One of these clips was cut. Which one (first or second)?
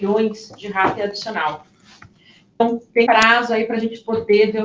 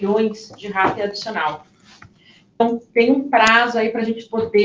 first